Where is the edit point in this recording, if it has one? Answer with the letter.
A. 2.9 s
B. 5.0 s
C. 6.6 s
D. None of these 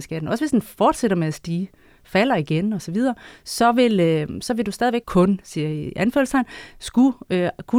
B